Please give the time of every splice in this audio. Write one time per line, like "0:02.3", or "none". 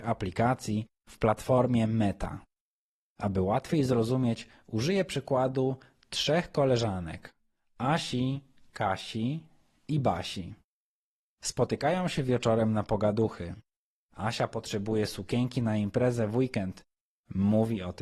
none

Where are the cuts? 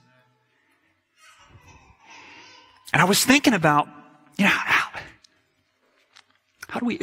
none

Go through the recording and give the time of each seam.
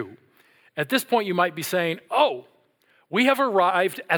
none

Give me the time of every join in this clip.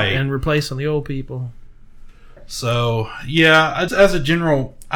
0:03.9

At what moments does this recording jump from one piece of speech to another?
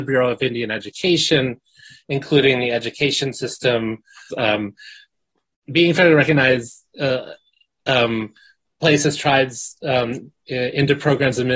0:04.3

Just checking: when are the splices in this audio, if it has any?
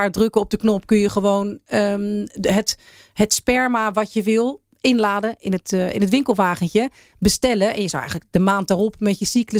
none

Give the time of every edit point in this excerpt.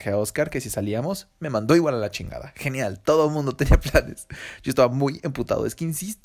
none

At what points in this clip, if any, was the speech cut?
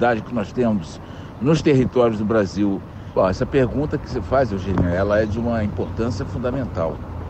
0:03.1

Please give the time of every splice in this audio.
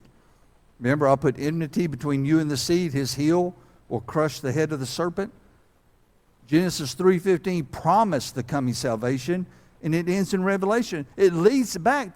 0:11.1

